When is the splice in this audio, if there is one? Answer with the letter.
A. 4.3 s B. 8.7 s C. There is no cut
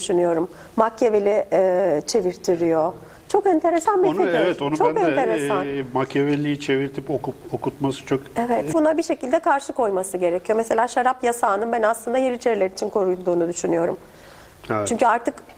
B